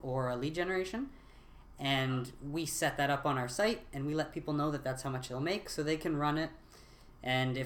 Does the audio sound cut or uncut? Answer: uncut